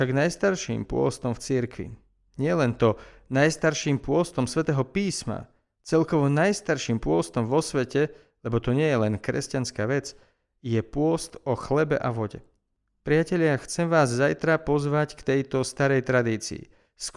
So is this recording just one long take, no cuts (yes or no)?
yes